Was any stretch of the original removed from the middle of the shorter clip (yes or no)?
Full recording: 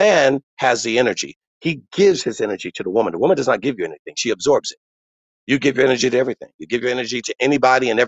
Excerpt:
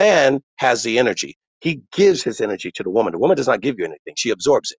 no